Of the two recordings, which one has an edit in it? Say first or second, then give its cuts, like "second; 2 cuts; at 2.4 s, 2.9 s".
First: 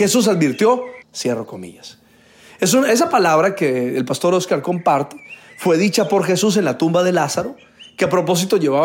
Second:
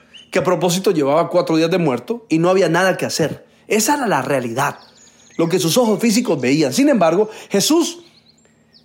first; 1 cut; at 1.0 s